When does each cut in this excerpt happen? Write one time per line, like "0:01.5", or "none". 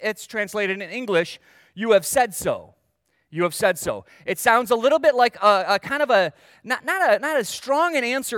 none